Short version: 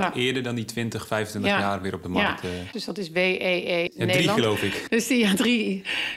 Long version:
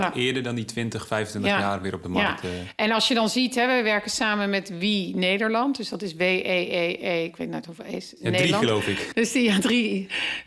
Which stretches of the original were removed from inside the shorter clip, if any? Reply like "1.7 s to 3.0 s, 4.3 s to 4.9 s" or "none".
2.7 s to 5.8 s, 6.9 s to 8.1 s